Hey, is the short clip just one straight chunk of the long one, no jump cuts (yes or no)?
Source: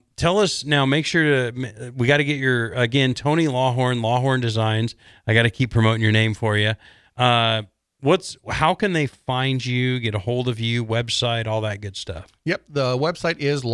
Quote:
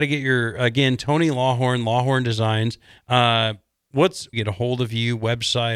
no